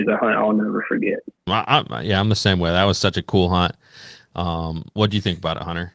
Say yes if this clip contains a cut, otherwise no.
yes